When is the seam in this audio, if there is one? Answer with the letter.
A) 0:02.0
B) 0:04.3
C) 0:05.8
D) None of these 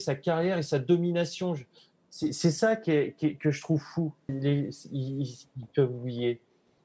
B